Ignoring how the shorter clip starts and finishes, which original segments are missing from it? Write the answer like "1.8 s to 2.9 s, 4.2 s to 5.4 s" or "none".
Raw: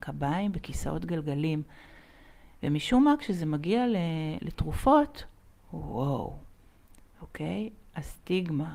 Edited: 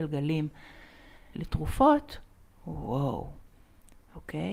2.5 s to 4.4 s